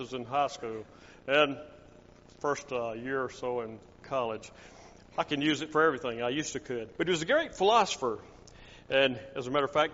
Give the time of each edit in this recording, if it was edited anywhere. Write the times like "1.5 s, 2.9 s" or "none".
7.0 s